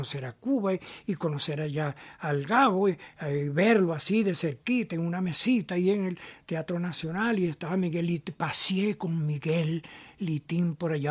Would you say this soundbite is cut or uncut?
uncut